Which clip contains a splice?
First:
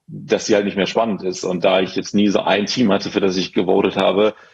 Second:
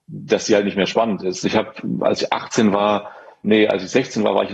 second; 2 cuts; at 1.4 s, 3.4 s

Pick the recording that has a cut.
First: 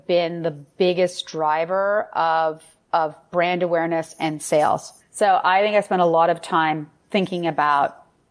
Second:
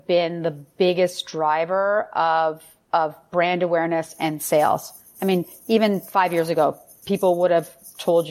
first; 1 cut; at 5.0 s

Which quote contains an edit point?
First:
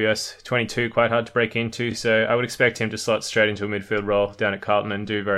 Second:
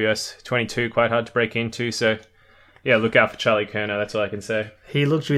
second; 1 cut; at 1.9 s

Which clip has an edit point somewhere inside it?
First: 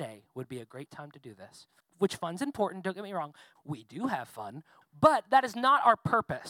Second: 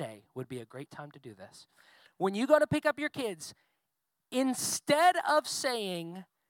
first; 3 cuts; at 1.8 s, 3.6 s, 4.8 s

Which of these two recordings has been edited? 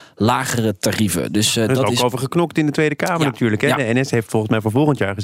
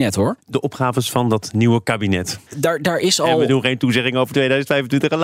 second; 1 cut; at 2.5 s

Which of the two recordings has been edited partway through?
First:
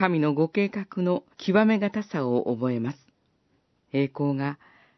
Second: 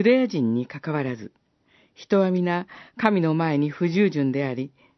first; 2 cuts; at 1.3 s, 3.8 s

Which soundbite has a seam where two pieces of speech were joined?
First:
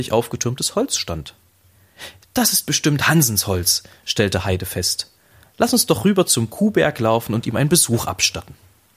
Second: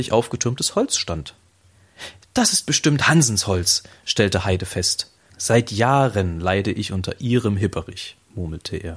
second; 1 cut; at 5.3 s

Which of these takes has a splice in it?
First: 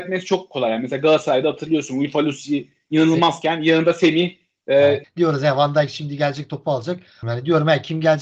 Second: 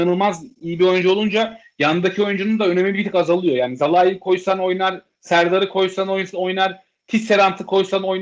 first; 2 cuts; at 5.0 s, 7.2 s

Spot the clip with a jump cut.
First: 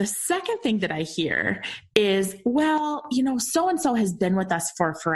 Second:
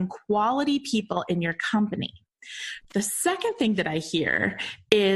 second; 1 cut; at 2.8 s

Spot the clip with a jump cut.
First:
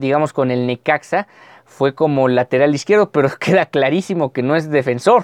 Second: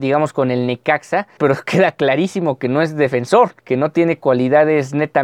second; 2 cuts; at 1.4 s, 3.6 s

